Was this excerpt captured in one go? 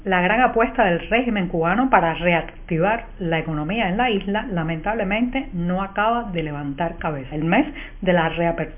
no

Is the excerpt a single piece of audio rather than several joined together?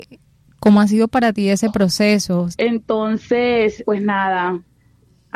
no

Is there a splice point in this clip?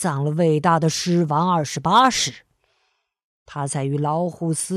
no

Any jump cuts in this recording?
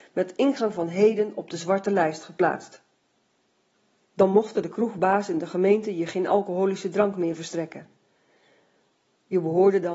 yes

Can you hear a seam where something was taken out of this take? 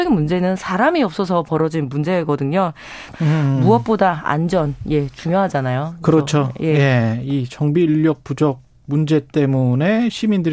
yes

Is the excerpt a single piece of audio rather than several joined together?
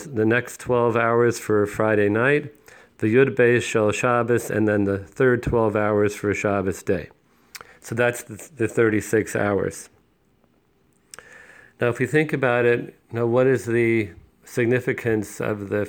yes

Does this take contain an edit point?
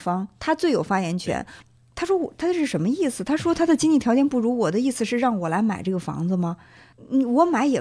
yes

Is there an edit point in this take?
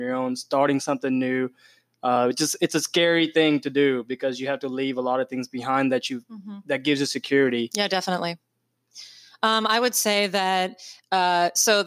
no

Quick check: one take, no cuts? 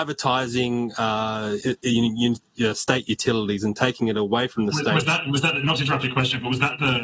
yes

